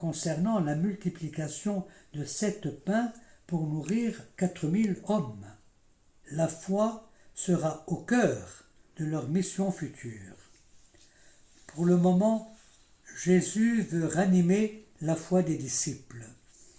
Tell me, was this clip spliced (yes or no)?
yes